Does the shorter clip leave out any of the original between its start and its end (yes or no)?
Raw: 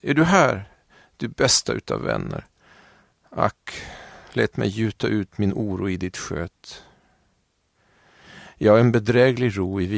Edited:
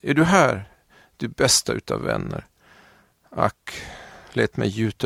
no